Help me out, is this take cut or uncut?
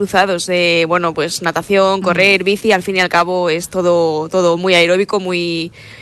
uncut